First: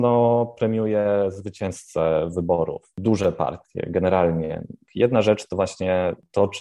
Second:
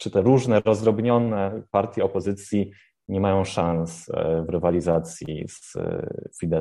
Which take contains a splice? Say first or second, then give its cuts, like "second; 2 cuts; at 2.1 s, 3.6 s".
first; 1 cut; at 4.9 s